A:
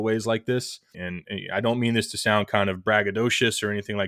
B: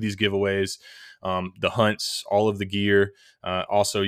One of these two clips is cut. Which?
A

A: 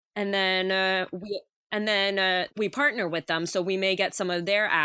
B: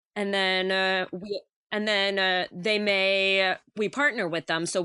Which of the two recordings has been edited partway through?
A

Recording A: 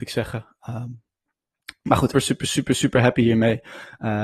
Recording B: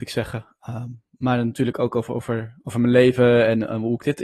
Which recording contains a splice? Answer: A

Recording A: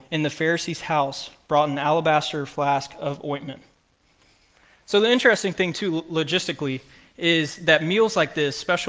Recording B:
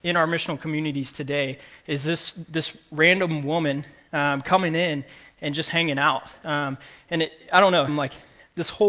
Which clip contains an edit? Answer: B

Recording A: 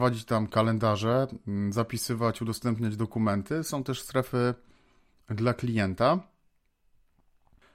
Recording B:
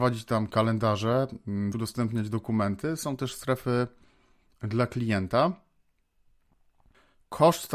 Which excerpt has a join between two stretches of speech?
B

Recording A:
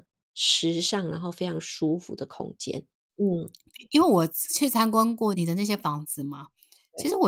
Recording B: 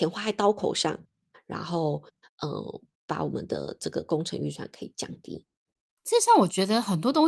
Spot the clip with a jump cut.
A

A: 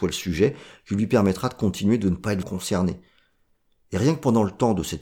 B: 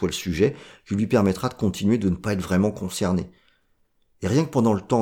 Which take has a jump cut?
A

